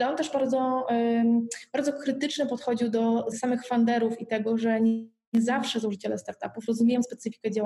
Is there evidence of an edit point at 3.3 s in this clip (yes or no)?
yes